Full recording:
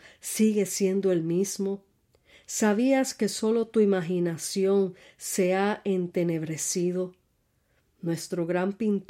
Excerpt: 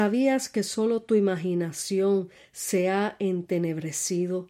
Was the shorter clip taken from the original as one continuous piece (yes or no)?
yes